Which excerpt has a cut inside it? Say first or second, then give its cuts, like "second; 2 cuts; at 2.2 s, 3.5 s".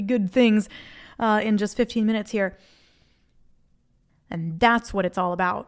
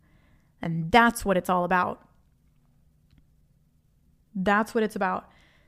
first; 1 cut; at 4.1 s